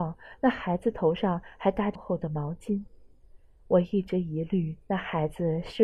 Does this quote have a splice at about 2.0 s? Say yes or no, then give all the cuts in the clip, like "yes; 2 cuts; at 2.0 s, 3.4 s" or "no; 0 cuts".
yes; 1 cut; at 2.0 s